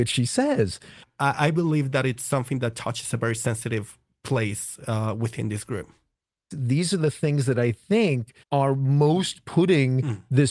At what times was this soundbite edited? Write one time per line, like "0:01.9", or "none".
0:01.0
0:06.5
0:08.4